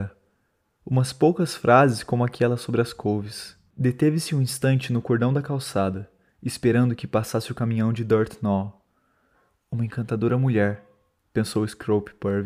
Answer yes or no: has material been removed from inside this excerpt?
no